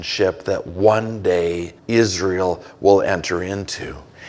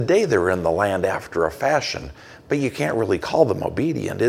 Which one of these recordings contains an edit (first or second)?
first